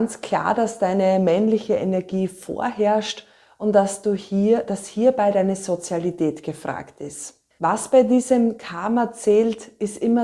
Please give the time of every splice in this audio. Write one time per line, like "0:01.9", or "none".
0:07.6